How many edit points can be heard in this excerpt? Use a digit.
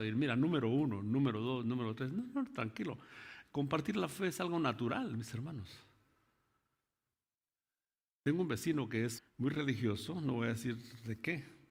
1